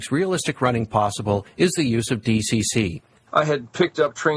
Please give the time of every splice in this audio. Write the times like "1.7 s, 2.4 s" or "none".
3.3 s

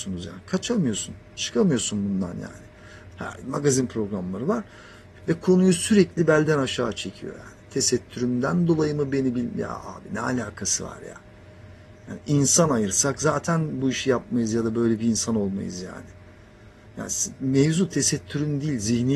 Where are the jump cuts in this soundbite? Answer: 3.1 s, 5.2 s

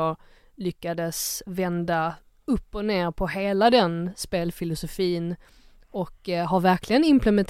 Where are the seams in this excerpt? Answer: none

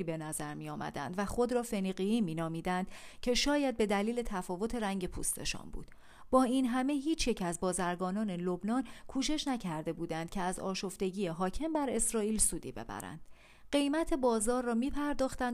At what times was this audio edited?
none

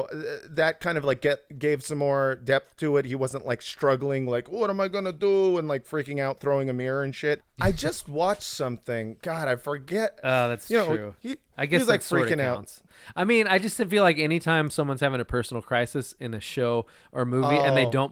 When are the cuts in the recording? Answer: 7.4 s, 10.2 s

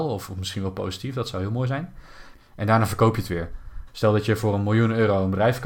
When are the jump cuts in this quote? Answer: 2.3 s, 3.9 s

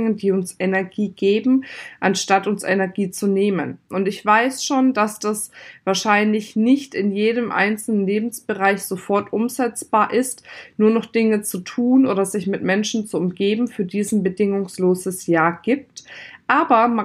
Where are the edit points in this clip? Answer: none

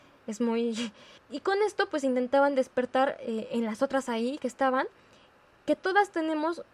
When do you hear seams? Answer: 1.2 s

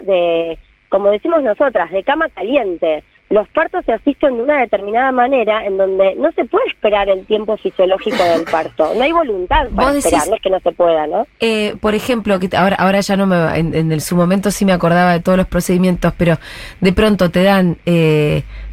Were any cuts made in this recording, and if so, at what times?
none

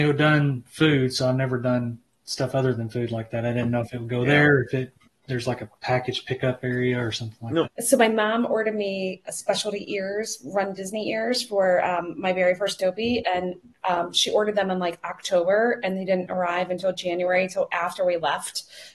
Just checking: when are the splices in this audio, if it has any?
7.6 s

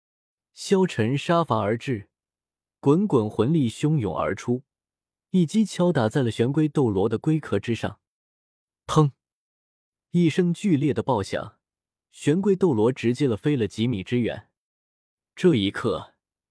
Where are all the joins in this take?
none

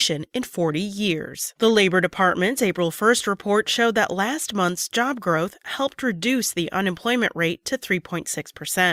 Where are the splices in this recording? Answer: none

